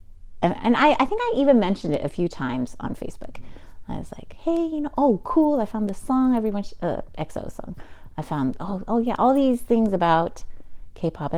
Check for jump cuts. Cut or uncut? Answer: uncut